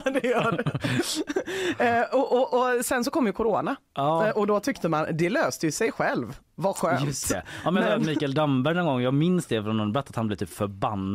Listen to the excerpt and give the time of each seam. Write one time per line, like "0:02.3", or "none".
none

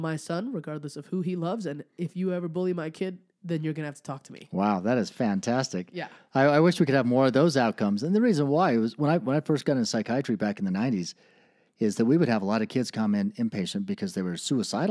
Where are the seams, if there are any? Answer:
none

